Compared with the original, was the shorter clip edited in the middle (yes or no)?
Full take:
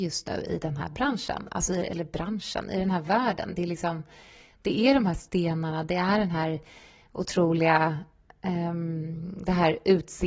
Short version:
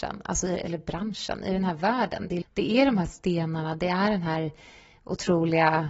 yes